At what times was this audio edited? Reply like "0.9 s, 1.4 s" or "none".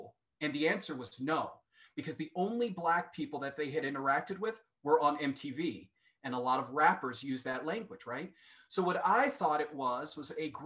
none